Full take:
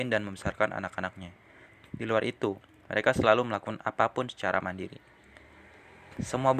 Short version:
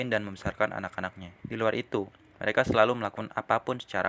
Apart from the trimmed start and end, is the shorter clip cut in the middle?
yes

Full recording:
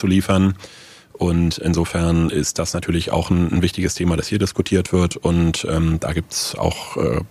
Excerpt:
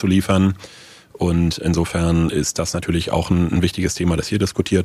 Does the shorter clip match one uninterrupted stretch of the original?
yes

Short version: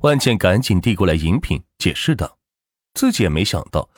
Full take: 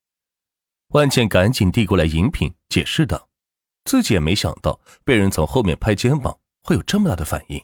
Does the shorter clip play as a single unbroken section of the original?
yes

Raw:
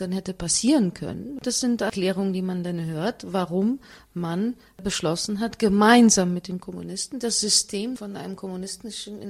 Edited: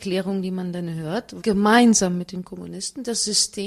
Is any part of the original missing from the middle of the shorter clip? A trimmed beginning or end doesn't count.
yes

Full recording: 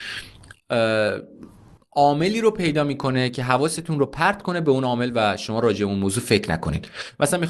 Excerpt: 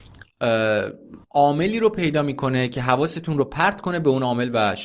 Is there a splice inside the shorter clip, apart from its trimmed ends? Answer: yes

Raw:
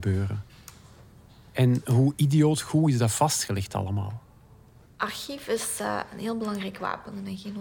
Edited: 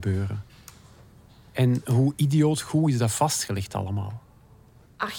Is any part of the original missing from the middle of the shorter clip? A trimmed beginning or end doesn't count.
no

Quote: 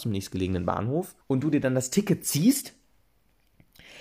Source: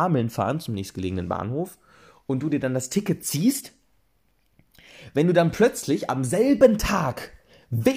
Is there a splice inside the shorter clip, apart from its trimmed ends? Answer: yes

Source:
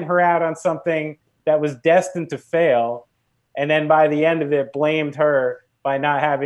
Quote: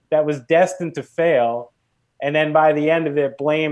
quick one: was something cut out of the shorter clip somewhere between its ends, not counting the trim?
no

